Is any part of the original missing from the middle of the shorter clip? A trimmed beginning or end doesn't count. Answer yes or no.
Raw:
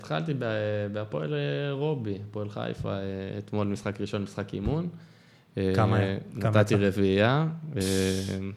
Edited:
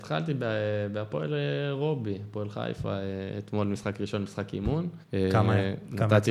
yes